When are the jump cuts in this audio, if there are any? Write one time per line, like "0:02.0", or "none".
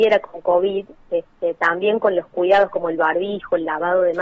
none